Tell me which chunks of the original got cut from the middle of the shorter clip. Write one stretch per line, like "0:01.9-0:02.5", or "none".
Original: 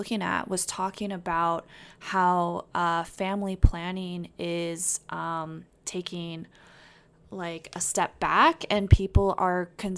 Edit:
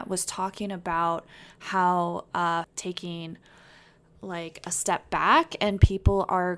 0:03.0-0:05.7